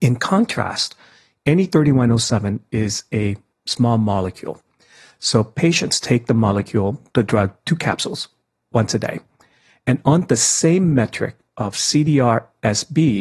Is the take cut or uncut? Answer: uncut